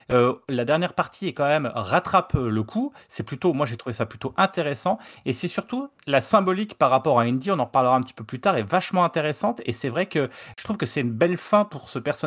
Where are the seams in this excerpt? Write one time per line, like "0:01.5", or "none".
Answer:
none